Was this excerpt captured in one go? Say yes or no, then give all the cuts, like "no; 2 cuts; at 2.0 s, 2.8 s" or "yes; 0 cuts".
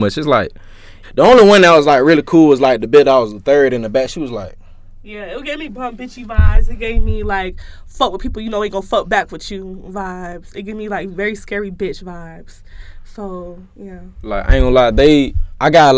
no; 1 cut; at 1.0 s